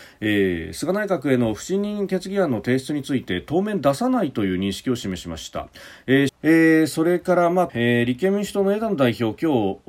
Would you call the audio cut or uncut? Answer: cut